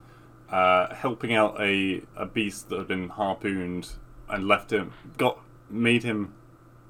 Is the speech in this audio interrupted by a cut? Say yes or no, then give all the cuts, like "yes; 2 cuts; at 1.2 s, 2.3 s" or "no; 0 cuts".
yes; 2 cuts; at 2.1 s, 5.2 s